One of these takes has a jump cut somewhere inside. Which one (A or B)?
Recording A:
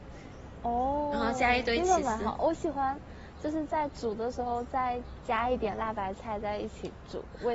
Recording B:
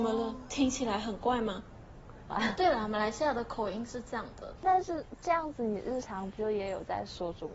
B